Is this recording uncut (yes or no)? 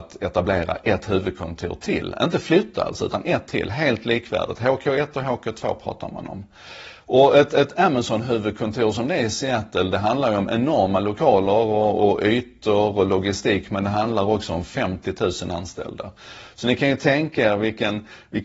yes